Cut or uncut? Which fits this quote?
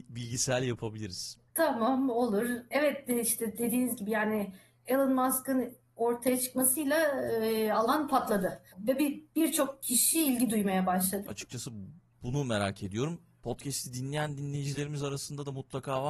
cut